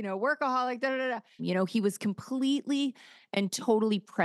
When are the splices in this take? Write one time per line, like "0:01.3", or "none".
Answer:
0:01.4